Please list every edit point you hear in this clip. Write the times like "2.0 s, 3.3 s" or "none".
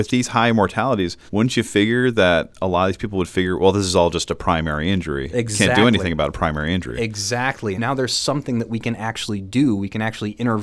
1.3 s, 7.7 s